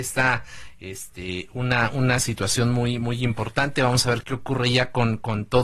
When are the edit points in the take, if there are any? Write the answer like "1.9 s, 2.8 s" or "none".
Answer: 4.2 s